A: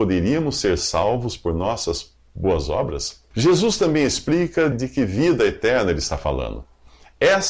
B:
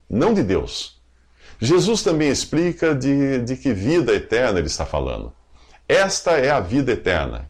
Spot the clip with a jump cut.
A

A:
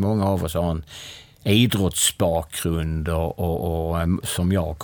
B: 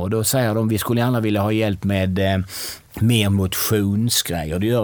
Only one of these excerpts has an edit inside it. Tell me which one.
B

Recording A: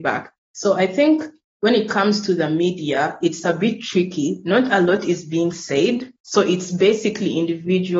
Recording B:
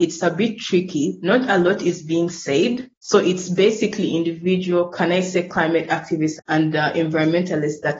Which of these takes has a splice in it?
B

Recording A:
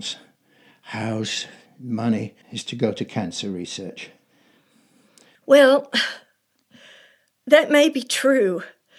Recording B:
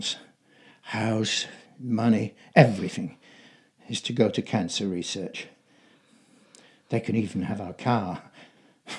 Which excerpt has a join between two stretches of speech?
A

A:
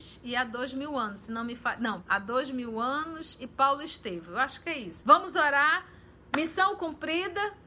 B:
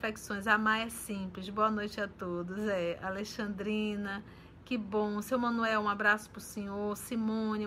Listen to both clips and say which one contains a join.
A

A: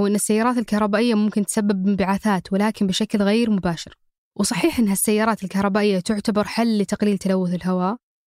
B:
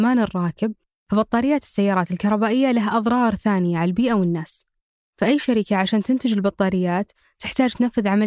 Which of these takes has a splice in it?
A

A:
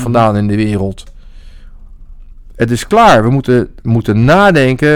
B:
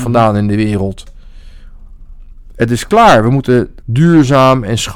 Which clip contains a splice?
B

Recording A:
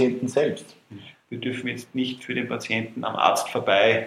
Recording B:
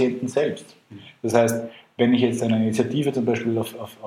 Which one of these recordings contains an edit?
A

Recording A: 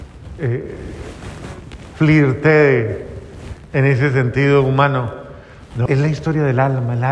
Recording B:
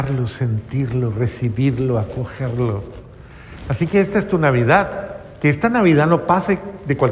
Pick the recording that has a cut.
A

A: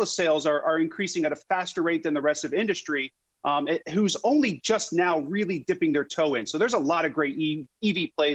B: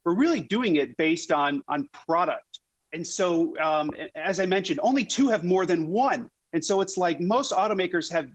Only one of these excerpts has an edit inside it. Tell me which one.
B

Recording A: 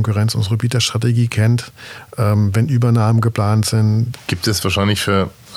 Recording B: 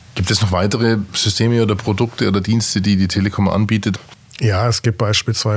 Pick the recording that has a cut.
A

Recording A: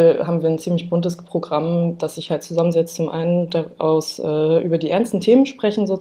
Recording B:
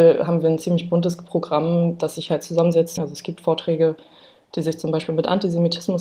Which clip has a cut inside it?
B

